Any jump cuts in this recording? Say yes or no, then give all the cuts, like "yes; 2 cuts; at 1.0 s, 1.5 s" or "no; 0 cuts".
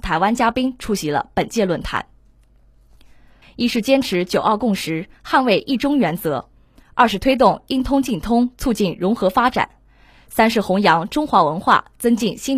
yes; 1 cut; at 3.4 s